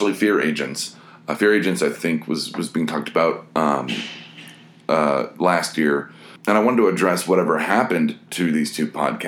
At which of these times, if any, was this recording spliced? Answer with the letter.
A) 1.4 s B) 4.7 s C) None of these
C